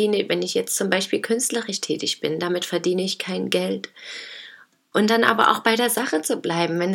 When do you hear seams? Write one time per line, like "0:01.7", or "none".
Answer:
0:04.9